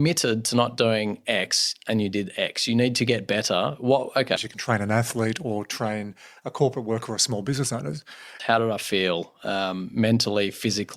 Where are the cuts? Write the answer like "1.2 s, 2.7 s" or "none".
4.4 s, 8.4 s